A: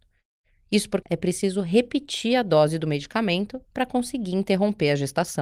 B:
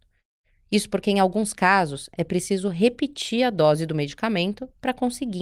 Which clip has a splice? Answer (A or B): A